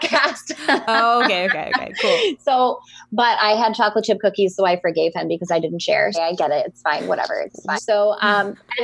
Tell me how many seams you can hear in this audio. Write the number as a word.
two